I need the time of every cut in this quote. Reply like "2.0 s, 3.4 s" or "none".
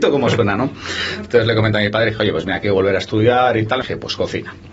3.8 s